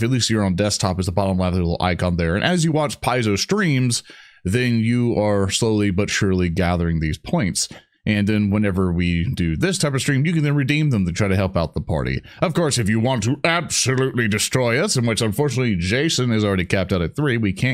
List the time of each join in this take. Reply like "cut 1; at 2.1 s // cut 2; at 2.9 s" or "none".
none